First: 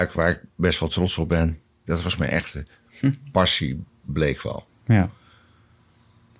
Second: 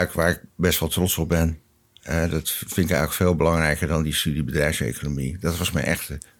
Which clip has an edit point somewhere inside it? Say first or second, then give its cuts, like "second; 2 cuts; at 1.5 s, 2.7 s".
first; 1 cut; at 1.9 s